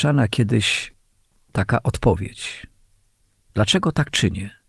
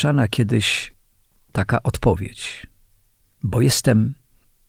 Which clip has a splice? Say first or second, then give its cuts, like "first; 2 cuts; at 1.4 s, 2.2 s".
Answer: second; 1 cut; at 3.4 s